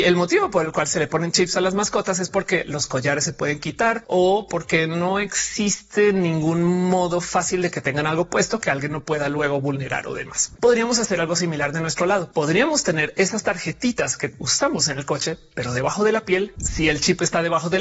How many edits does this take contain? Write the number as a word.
two